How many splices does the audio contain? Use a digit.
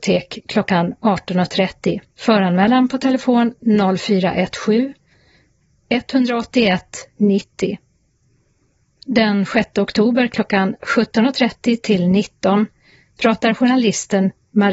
1